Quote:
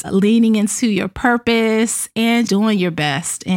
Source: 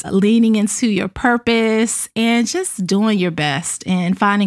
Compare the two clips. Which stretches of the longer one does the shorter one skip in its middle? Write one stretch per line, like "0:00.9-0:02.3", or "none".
0:02.5-0:02.9